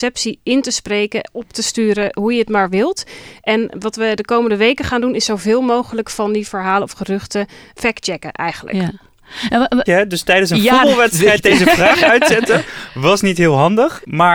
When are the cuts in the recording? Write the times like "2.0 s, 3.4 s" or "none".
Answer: 9.9 s